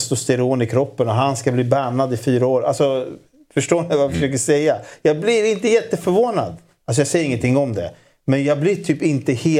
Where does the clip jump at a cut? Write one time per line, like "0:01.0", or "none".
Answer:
0:06.8